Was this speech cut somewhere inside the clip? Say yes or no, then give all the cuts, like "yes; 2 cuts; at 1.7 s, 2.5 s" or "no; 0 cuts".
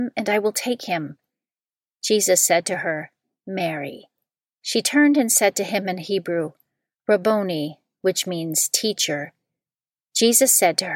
no; 0 cuts